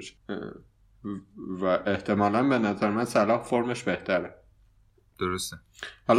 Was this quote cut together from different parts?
no; 0 cuts

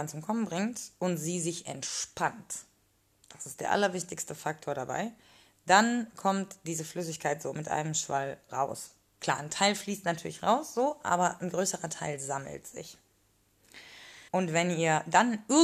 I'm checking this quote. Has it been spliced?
yes; 2 cuts; at 9.2 s, 14.3 s

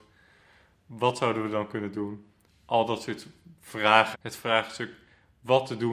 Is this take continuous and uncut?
no; 2 cuts; at 2.5 s, 4.1 s

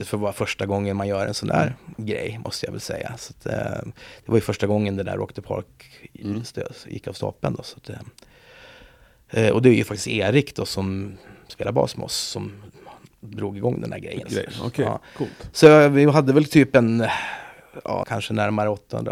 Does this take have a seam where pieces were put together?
yes; 2 cuts; at 14.2 s, 18.0 s

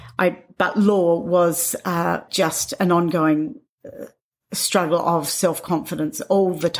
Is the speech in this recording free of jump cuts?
no; 1 cut; at 2.3 s

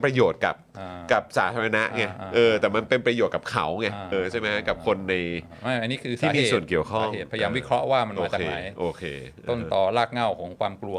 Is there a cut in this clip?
yes; 1 cut; at 4.1 s

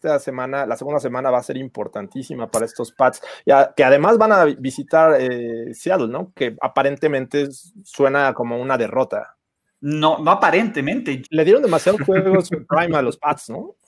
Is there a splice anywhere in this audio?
yes; 1 cut; at 11.2 s

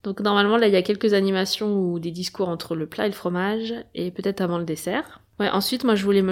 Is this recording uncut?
yes; 0 cuts

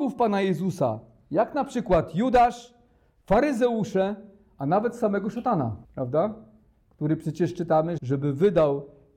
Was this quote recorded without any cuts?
no; 2 cuts; at 5.8 s, 8.0 s

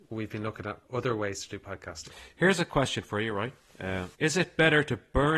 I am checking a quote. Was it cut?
yes; 1 cut; at 4.1 s

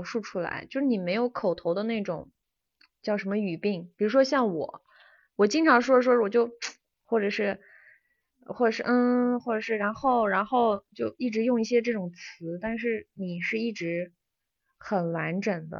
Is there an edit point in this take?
no; 0 cuts

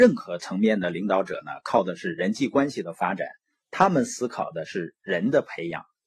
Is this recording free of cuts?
yes; 0 cuts

